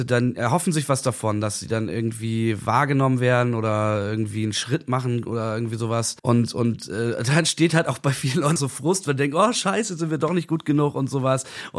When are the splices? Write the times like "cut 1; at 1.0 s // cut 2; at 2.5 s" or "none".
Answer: cut 1; at 6.2 s // cut 2; at 8.6 s